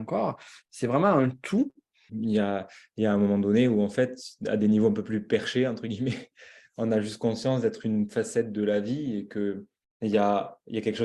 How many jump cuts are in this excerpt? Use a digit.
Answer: 1